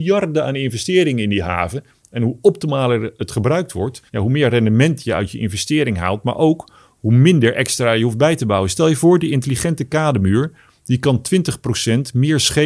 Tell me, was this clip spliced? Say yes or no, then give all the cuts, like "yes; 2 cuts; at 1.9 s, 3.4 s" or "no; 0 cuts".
yes; 1 cut; at 4.1 s